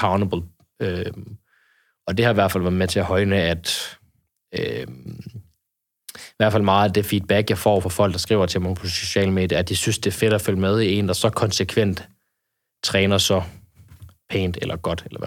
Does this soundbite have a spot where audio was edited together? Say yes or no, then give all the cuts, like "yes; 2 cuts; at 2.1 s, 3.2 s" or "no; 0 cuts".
no; 0 cuts